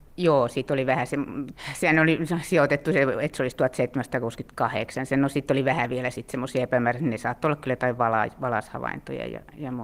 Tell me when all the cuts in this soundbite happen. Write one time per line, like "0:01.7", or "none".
none